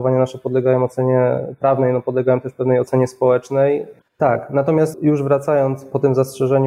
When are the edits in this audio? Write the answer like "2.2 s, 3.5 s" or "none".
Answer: 4.0 s